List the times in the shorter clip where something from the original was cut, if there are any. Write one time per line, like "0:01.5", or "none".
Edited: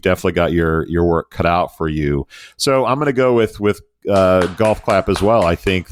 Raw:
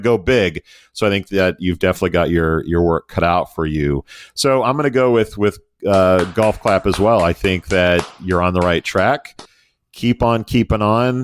none